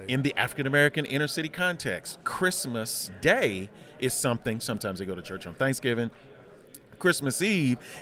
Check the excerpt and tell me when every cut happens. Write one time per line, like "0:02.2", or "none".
0:04.6